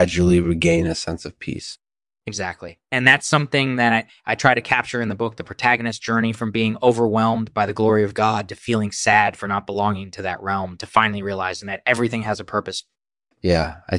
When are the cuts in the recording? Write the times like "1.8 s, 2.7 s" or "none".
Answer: none